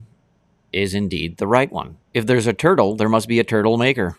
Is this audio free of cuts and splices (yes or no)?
no